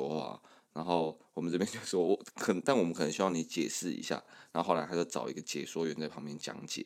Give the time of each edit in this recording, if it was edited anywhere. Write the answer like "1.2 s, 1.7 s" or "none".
none